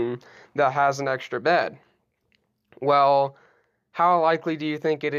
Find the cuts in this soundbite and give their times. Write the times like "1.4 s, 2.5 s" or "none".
none